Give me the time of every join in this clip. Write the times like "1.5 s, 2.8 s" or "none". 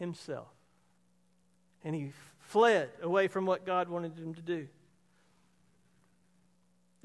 none